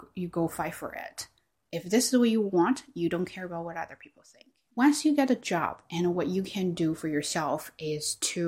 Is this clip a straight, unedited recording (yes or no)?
no